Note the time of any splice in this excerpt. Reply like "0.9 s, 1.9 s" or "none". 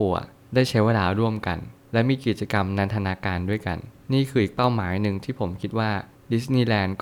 none